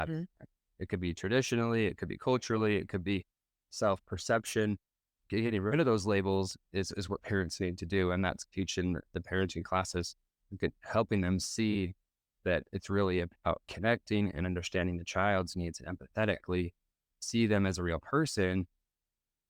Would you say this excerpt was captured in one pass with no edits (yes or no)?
yes